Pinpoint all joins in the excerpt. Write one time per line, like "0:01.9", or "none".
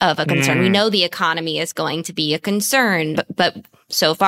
0:03.1